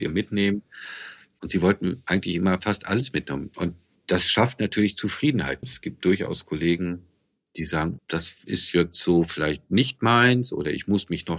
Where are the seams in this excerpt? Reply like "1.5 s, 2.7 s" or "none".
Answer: 3.5 s, 5.6 s, 8.0 s